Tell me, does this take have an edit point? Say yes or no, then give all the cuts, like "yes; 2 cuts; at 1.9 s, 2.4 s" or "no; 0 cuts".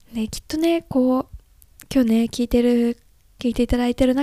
no; 0 cuts